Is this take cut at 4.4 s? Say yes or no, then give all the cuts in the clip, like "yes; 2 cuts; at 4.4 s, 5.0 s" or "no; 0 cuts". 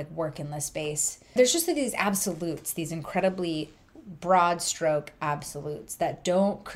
no; 1 cut; at 1.4 s